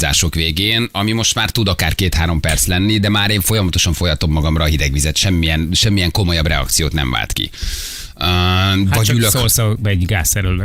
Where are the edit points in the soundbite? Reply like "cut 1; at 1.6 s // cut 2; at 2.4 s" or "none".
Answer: none